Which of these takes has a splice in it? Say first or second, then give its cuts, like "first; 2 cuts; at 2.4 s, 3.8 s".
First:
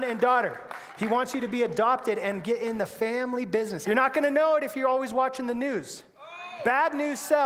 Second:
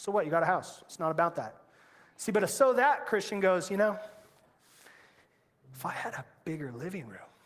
first; 1 cut; at 3.8 s